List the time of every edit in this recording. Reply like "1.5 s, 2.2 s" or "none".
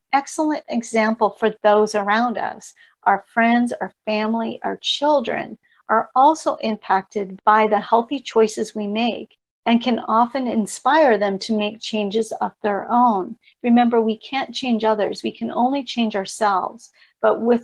none